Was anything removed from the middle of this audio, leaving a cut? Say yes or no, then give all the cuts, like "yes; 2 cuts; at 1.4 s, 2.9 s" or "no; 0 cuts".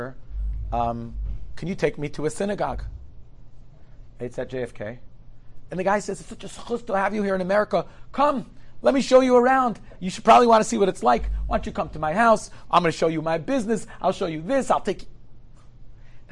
yes; 1 cut; at 5.7 s